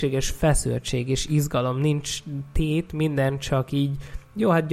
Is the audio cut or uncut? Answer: uncut